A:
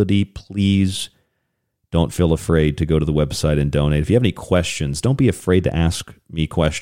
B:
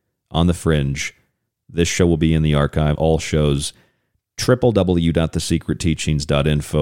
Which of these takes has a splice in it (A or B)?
B